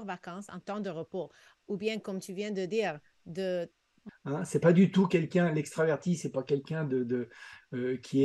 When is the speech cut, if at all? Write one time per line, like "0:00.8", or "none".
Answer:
0:04.1